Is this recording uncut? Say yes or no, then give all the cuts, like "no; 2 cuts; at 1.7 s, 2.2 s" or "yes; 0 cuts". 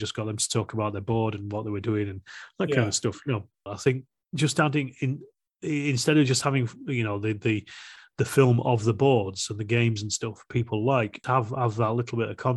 no; 2 cuts; at 3.7 s, 11.2 s